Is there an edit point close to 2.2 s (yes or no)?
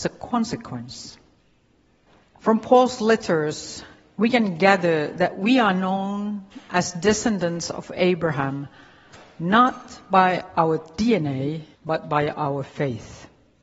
yes